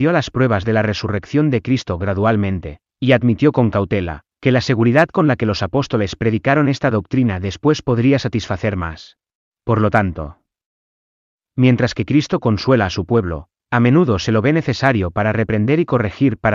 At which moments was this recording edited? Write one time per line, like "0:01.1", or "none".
0:09.5